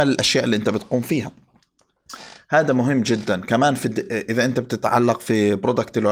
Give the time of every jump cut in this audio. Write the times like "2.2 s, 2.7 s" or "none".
none